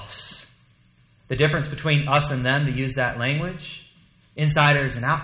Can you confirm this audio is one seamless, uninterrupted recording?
no; 1 cut; at 1.1 s

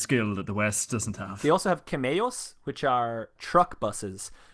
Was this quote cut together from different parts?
yes; 1 cut; at 3.4 s

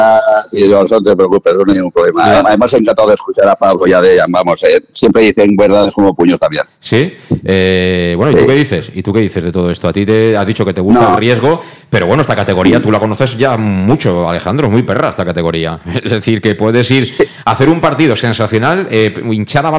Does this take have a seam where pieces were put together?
no; 0 cuts

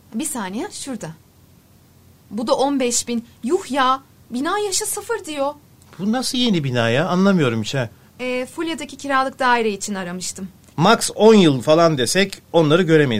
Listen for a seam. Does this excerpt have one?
yes; 2 cuts; at 8.1 s, 10.7 s

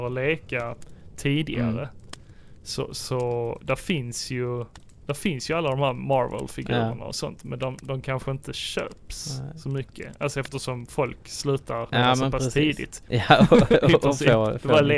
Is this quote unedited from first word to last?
no; 2 cuts; at 11.9 s, 13.1 s

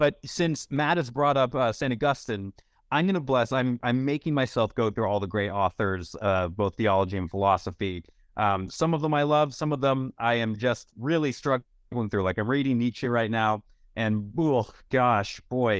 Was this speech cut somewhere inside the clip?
no; 0 cuts

